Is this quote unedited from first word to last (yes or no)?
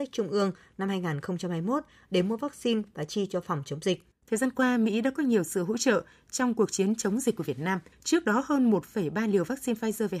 no